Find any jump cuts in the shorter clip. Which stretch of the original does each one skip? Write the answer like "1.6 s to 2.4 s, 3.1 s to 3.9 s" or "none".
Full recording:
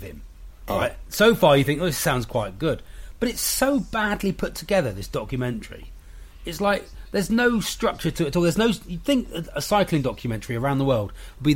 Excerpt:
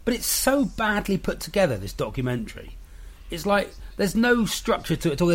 none